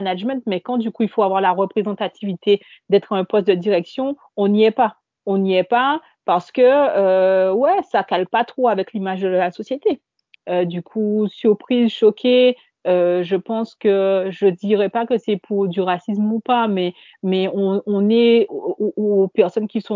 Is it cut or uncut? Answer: cut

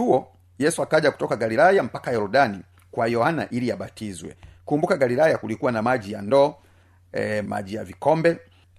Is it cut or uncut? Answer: cut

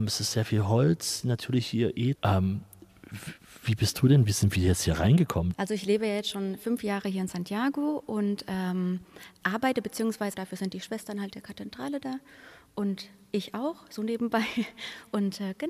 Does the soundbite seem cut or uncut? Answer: cut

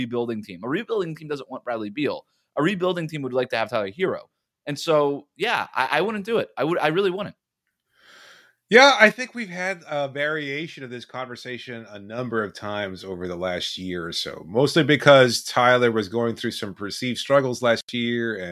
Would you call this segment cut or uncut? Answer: uncut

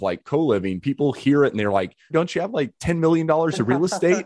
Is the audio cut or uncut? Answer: cut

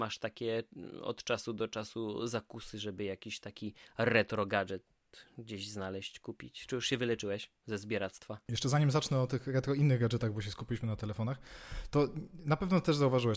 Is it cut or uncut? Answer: uncut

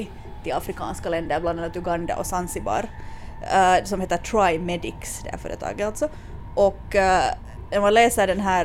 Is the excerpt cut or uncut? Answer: uncut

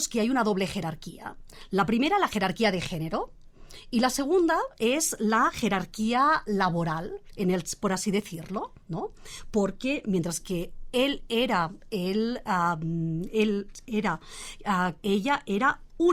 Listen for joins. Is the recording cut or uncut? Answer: cut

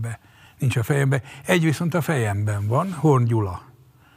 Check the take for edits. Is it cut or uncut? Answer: uncut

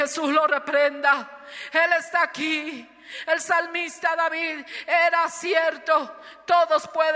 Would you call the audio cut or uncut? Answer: uncut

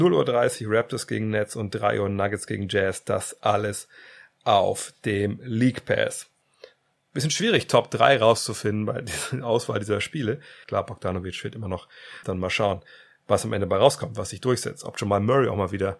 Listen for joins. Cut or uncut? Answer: cut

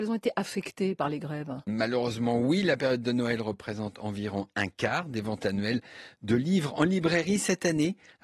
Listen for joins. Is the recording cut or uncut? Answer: uncut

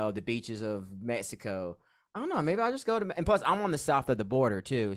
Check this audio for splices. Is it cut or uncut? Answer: uncut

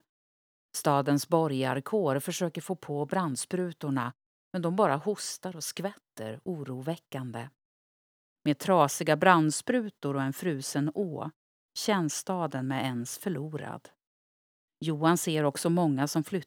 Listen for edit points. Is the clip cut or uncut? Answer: cut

